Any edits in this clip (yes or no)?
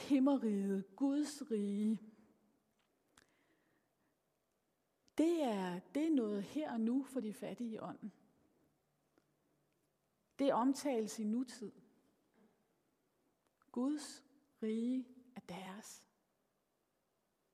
no